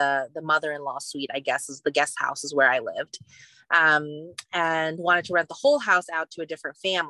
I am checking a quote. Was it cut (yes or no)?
no